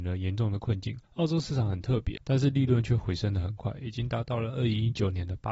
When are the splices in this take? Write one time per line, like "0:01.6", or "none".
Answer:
0:01.1
0:02.2